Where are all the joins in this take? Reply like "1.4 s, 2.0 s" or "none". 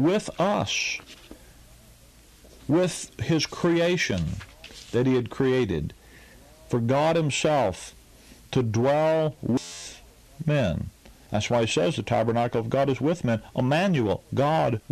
none